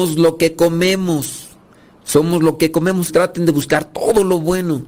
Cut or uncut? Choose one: cut